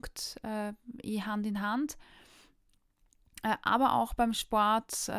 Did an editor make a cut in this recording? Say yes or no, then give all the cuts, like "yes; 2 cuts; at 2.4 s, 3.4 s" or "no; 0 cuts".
no; 0 cuts